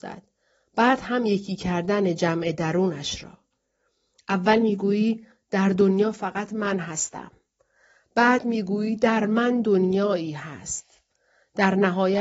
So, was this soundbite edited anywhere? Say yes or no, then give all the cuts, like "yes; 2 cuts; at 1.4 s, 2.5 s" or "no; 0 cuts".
no; 0 cuts